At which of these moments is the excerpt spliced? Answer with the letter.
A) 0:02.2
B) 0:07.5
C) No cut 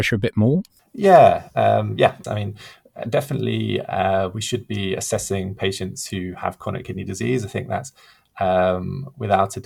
A